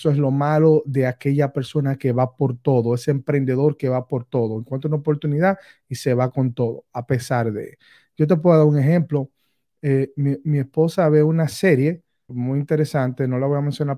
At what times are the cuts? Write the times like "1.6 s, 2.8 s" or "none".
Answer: 12.3 s